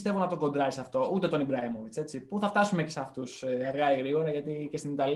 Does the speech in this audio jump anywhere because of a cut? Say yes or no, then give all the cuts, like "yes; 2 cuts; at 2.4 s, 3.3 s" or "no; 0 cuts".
no; 0 cuts